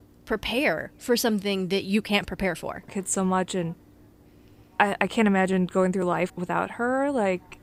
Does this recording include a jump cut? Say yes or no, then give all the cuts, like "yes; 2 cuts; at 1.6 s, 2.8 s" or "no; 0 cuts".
yes; 2 cuts; at 2.9 s, 6.3 s